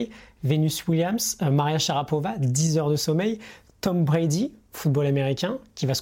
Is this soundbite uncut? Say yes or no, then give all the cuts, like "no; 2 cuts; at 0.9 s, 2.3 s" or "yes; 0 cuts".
yes; 0 cuts